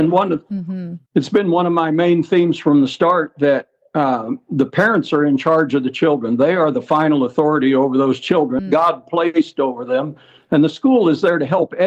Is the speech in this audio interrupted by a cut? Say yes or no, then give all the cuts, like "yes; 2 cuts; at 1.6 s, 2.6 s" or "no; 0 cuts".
yes; 1 cut; at 8.6 s